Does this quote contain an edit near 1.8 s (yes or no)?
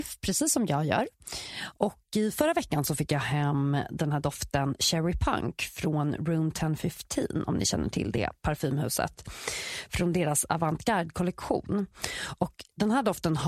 yes